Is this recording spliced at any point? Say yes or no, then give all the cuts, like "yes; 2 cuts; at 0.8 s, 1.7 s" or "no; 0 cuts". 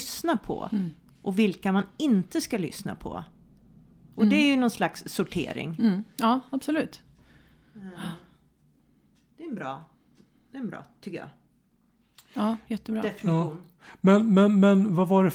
no; 0 cuts